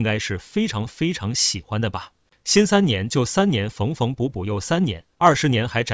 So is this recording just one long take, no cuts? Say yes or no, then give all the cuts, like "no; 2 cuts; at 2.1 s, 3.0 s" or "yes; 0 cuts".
no; 1 cut; at 2.3 s